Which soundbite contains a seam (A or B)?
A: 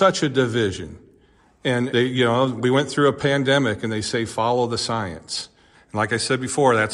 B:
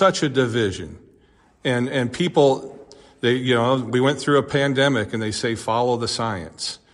A